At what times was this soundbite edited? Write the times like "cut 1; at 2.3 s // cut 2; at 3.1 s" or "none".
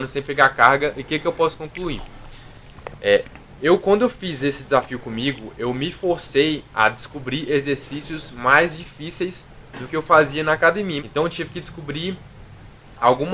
cut 1; at 11.0 s